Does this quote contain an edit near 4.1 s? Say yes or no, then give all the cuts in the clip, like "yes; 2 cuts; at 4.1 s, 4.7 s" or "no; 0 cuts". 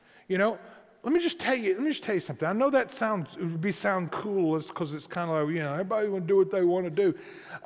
yes; 1 cut; at 4.1 s